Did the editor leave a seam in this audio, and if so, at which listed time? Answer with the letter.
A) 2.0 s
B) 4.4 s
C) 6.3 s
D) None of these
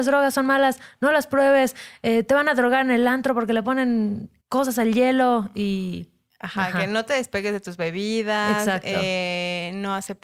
B